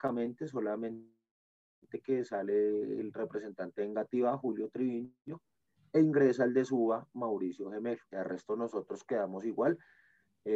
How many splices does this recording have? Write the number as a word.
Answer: one